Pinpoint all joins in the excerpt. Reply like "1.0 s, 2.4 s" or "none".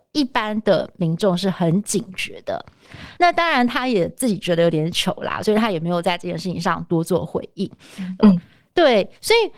3.2 s, 8.2 s